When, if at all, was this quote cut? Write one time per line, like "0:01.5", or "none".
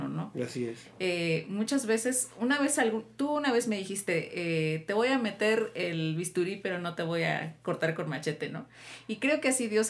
none